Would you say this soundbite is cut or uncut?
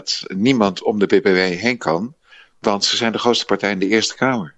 uncut